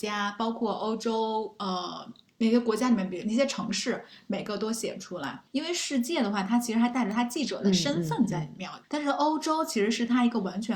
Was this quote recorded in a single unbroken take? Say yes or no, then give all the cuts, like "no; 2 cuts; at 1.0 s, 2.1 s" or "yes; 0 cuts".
no; 2 cuts; at 5.5 s, 8.8 s